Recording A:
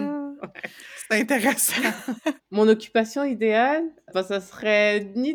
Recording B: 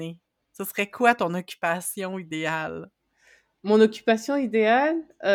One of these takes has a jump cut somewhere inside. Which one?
A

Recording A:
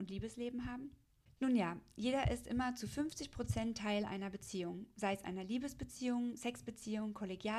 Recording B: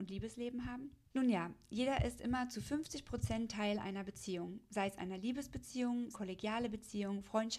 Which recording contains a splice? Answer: B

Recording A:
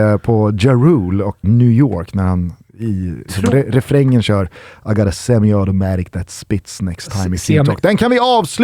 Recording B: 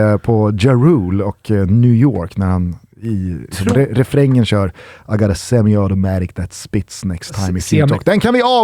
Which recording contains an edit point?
A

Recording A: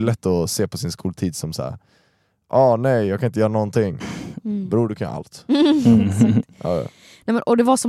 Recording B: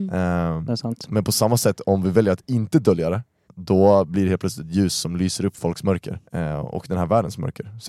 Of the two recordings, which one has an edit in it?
B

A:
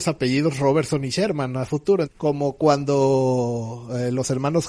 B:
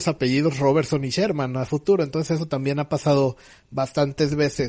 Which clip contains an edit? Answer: A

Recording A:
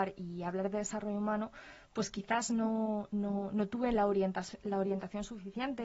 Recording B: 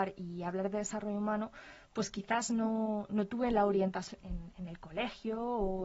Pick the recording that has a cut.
B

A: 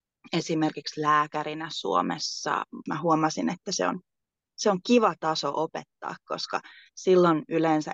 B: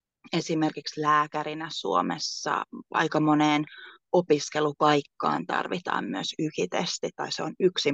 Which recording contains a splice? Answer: A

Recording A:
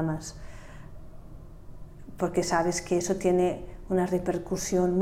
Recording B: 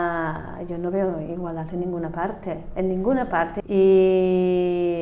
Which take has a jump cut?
B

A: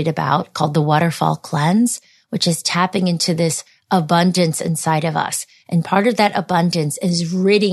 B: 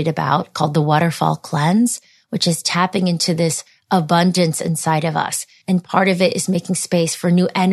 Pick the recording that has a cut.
B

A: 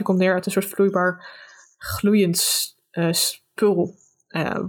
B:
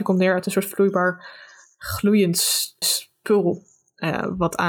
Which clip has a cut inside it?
B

